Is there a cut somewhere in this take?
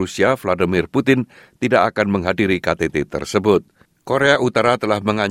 yes; 1 cut; at 3.9 s

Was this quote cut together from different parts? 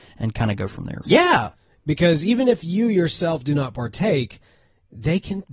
yes; 1 cut; at 1.0 s

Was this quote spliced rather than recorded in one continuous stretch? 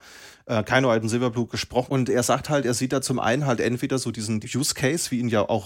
yes; 2 cuts; at 1.9 s, 4.4 s

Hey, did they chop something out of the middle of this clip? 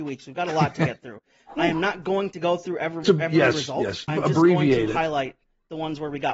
yes; 2 cuts; at 3.0 s, 4.1 s

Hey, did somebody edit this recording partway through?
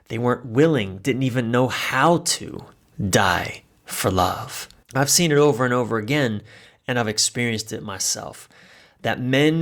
yes; 1 cut; at 4.8 s

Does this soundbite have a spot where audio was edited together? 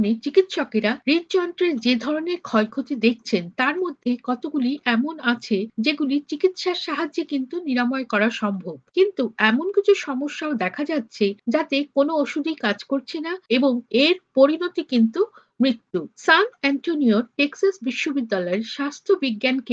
yes; 1 cut; at 9.7 s

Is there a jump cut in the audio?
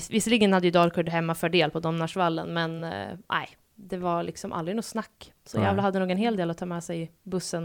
no; 0 cuts

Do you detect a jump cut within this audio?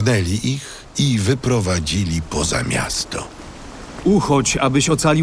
yes; 1 cut; at 4.0 s

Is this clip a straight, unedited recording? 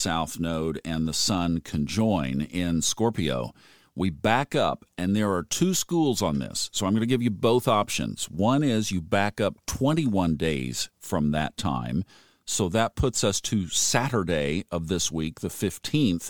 yes; 0 cuts

